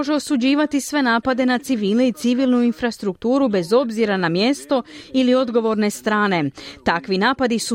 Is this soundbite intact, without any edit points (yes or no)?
yes